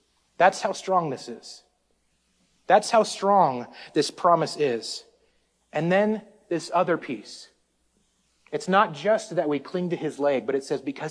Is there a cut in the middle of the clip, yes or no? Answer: no